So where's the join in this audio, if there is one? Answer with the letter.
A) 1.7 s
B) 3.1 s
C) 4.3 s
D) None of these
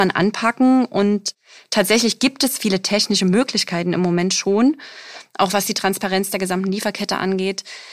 D